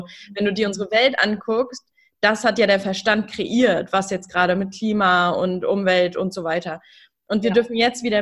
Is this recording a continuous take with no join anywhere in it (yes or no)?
yes